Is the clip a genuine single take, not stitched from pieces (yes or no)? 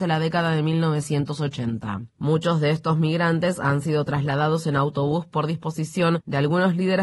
no